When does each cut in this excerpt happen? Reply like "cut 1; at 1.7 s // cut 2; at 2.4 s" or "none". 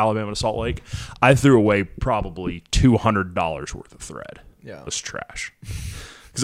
cut 1; at 4.9 s